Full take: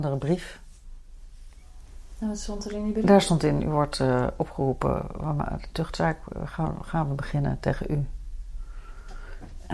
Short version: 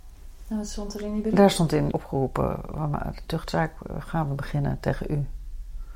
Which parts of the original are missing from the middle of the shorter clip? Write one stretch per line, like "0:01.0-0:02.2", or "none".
0:03.6-0:04.4
0:06.5-0:06.8